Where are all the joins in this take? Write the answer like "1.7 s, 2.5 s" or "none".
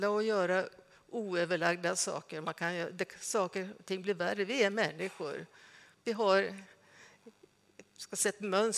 none